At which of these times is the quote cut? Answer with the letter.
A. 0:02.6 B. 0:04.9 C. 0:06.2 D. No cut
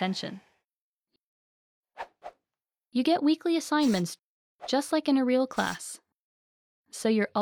D